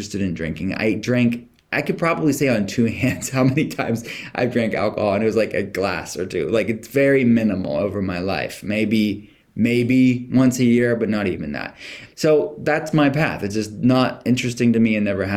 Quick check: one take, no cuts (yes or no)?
yes